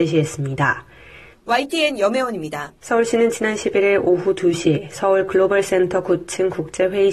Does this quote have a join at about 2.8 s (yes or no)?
yes